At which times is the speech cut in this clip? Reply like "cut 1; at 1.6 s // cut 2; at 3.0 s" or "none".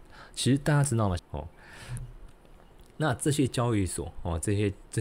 cut 1; at 1.2 s